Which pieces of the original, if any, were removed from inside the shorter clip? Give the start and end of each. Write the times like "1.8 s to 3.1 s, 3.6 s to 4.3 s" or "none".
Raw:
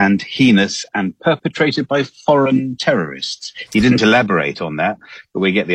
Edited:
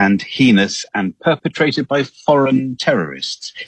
none

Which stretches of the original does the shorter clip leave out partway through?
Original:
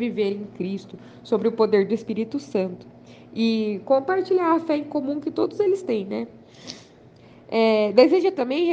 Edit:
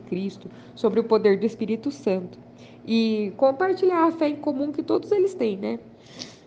none

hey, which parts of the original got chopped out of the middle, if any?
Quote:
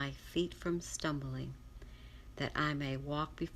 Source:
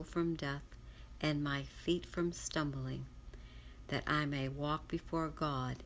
none

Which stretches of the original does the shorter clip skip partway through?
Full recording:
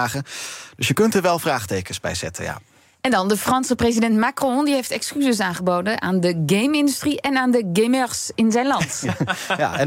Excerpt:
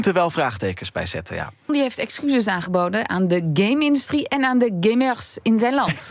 2.8 s to 4.6 s

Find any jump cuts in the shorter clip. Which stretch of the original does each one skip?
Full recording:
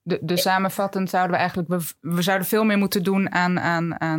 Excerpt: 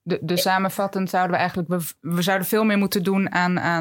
none

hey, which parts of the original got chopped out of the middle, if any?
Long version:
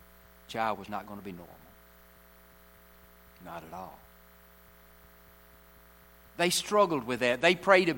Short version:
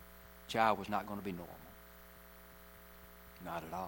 none

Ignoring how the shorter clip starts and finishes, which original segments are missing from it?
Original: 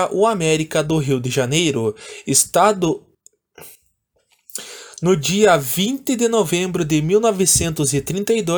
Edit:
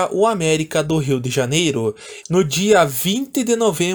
2.2 s to 4.9 s

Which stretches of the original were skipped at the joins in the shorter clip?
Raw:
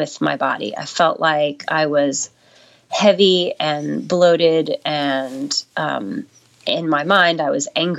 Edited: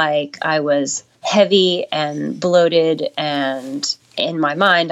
2.4 s to 2.8 s, 5.7 s to 6.5 s

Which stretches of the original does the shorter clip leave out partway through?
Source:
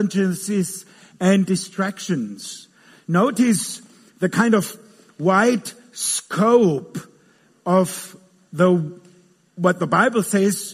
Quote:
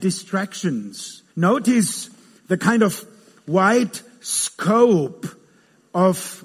2.7 s to 3.0 s

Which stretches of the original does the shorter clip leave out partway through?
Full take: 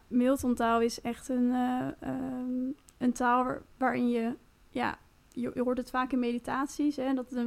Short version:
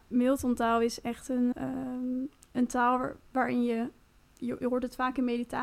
1.5 s to 2.0 s, 4.7 s to 5.1 s

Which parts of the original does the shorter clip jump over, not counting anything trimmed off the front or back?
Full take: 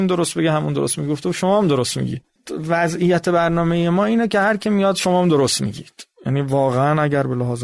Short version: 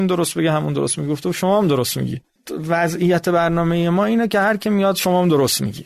none

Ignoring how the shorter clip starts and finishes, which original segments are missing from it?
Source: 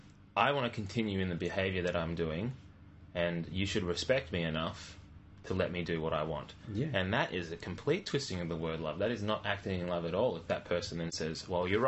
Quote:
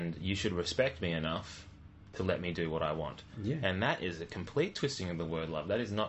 none

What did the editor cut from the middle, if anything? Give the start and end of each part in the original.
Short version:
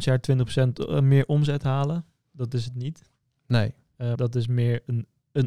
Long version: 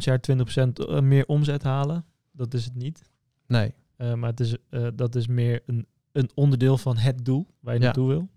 4.2 s to 5.0 s

